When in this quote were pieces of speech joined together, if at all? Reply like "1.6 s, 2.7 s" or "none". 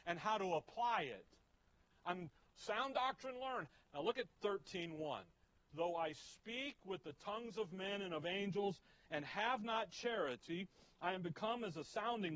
1.9 s, 3.9 s, 5.7 s